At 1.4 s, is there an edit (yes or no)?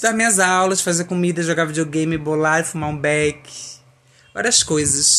no